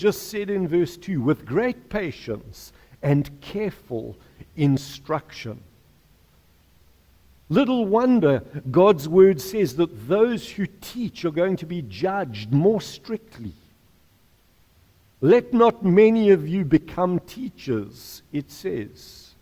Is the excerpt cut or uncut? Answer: uncut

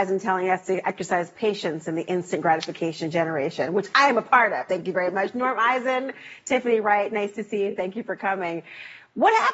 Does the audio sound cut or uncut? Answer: uncut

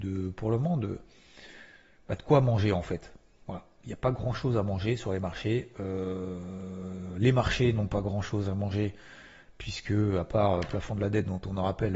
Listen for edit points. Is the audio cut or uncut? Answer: uncut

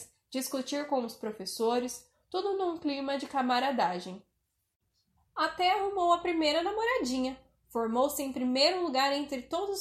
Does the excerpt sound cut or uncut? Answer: uncut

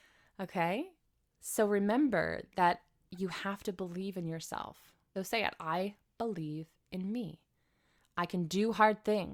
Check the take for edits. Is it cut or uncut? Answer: cut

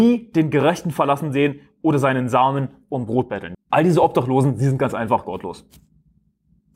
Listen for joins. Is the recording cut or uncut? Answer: cut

